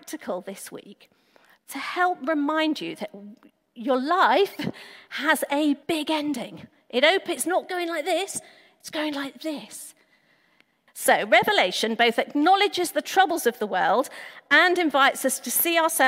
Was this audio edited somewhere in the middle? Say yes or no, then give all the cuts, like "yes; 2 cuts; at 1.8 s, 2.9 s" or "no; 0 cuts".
yes; 2 cuts; at 5.8 s, 10.9 s